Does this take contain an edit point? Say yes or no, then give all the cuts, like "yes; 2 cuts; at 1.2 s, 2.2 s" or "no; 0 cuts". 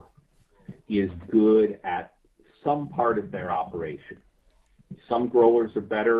yes; 1 cut; at 1.2 s